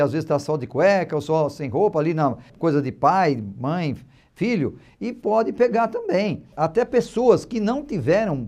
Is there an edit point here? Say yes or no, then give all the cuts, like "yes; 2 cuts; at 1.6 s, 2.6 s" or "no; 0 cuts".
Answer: yes; 1 cut; at 2.5 s